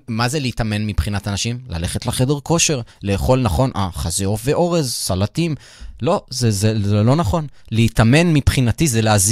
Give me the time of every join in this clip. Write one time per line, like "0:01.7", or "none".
none